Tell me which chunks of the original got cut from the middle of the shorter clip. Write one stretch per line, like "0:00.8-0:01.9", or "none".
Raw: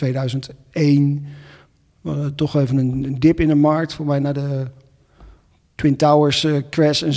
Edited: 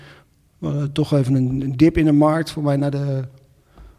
none